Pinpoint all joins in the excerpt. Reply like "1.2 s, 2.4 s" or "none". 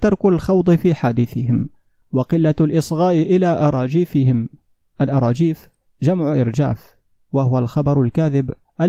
none